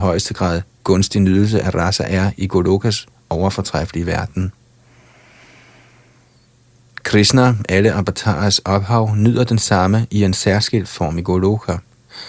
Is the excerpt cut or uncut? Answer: uncut